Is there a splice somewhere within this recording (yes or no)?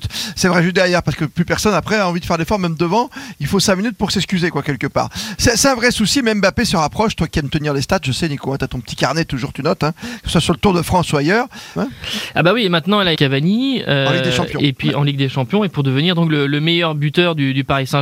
yes